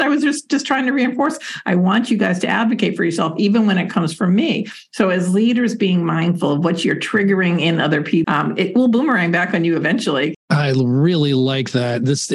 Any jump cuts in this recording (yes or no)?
yes